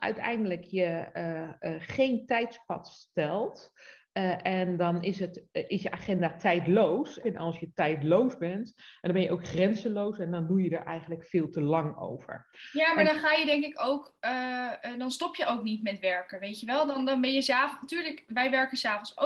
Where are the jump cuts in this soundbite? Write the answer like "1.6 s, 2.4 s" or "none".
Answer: 7.2 s